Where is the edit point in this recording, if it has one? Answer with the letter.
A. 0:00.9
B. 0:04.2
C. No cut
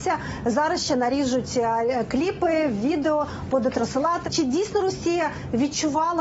B